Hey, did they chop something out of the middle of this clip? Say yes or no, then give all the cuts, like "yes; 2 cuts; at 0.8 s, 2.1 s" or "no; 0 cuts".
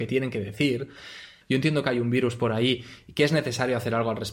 yes; 1 cut; at 1.4 s